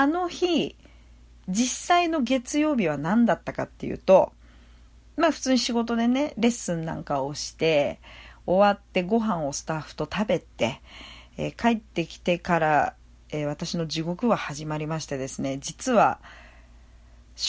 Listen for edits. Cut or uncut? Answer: uncut